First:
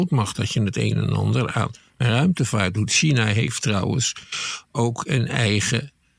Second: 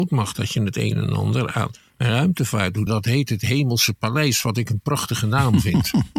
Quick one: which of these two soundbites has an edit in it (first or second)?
second